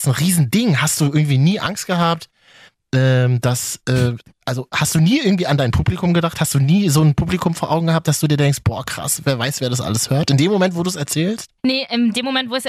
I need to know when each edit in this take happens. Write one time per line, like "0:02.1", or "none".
0:11.6